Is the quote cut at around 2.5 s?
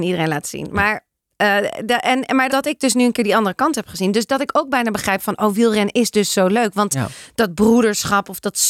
yes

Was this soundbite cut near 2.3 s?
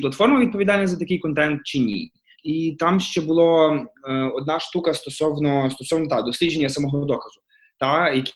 yes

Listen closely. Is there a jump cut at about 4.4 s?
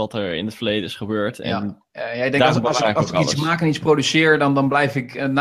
no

